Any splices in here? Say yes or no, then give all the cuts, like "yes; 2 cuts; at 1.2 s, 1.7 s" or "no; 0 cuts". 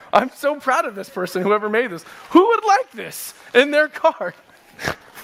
no; 0 cuts